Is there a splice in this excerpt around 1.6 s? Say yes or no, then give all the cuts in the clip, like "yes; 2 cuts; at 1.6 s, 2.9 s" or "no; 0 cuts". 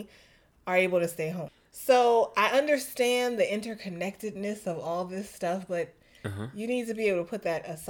no; 0 cuts